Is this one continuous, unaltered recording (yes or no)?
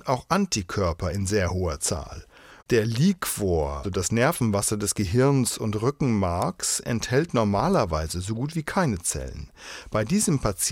no